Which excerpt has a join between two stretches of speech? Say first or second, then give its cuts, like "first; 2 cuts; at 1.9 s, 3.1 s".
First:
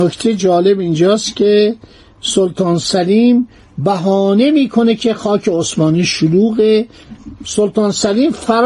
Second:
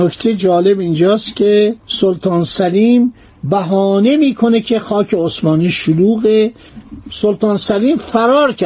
second; 1 cut; at 1.8 s